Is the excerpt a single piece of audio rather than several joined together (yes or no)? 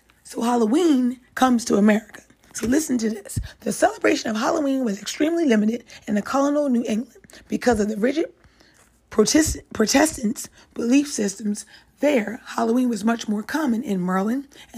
yes